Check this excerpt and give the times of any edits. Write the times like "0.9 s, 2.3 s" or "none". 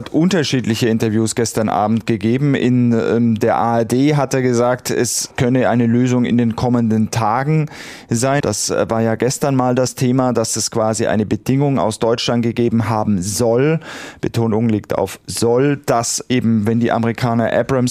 8.4 s